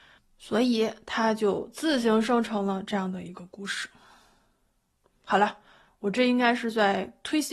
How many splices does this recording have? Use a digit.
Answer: 0